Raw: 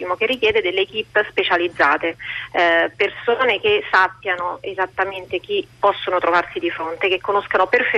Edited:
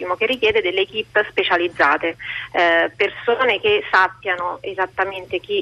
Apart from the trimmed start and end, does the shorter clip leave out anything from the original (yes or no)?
no